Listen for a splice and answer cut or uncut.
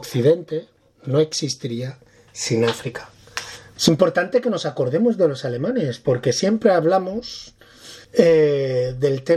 cut